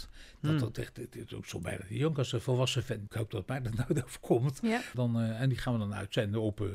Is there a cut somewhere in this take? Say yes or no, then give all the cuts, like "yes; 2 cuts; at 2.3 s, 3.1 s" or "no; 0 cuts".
yes; 2 cuts; at 3.1 s, 4.9 s